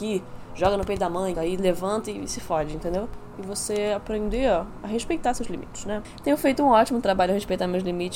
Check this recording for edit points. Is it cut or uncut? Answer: cut